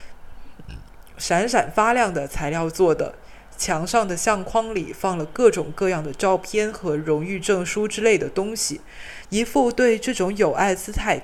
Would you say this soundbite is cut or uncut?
cut